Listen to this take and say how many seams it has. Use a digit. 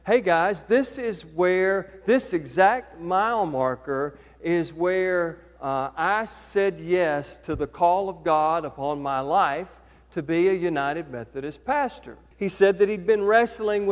1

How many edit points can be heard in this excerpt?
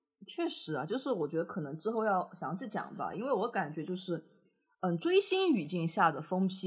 0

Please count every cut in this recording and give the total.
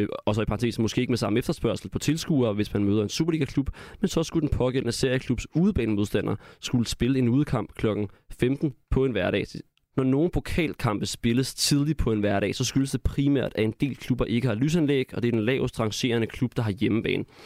1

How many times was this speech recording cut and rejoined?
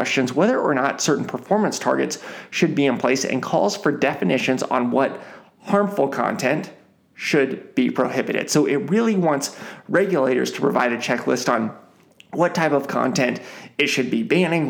0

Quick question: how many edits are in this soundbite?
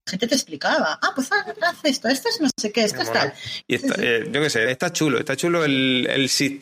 2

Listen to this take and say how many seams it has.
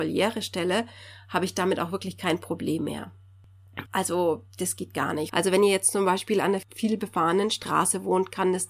2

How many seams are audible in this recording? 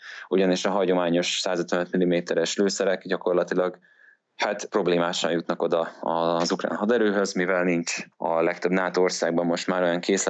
0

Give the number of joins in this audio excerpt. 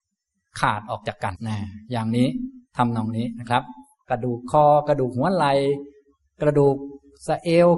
1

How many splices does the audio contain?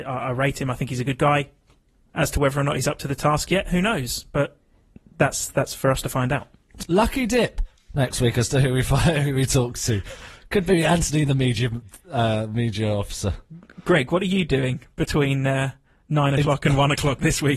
1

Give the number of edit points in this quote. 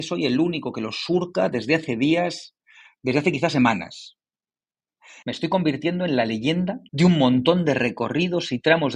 2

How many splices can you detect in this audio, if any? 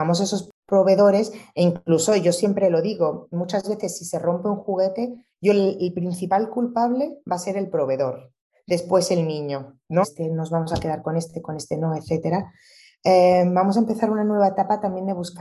1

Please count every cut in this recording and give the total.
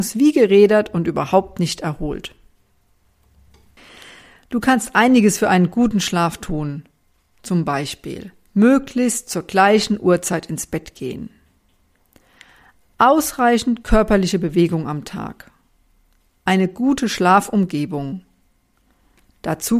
0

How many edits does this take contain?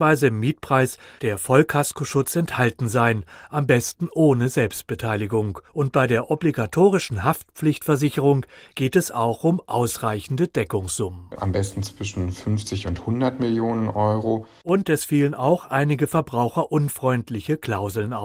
2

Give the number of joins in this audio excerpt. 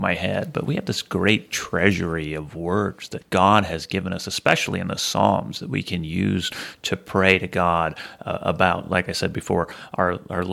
0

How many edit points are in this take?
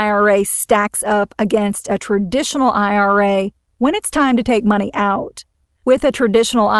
1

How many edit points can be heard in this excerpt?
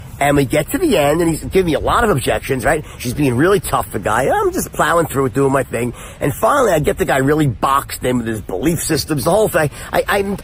1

